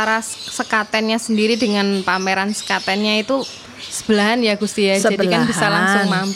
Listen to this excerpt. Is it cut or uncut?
uncut